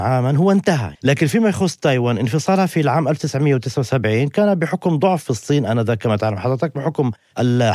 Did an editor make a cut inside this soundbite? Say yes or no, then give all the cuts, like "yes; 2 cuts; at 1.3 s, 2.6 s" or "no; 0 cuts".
yes; 1 cut; at 0.9 s